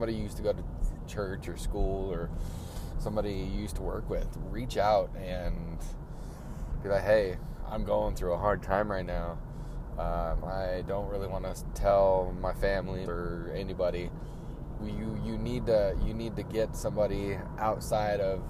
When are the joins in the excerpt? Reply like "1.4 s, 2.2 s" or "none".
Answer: 13.1 s, 14.8 s